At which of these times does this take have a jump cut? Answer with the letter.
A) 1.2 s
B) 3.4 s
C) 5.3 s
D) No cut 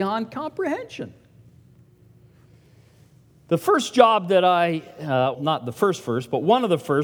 C